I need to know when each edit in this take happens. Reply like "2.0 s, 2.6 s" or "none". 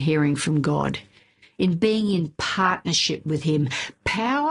none

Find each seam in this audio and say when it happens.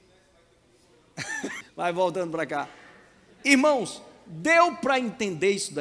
1.6 s

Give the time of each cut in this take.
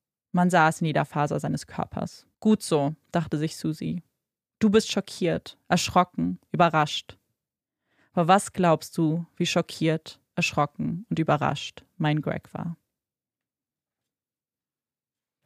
2.3 s

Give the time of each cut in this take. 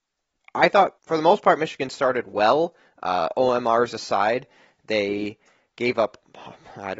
1.0 s

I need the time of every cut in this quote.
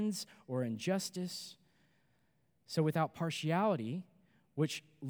none

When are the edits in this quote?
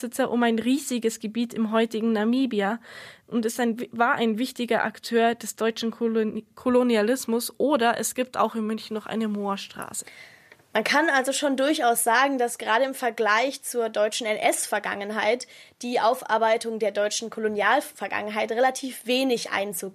none

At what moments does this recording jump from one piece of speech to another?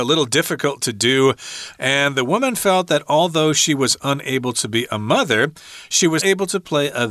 1.7 s, 6.2 s

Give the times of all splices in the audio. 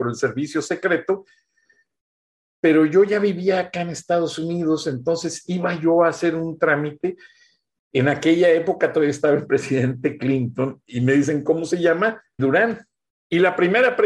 12.4 s

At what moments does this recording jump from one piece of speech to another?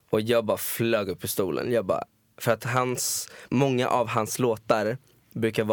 none

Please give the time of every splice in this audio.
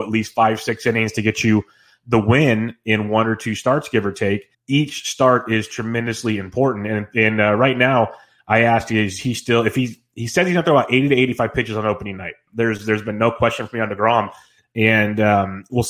4.5 s, 12.5 s, 14.6 s

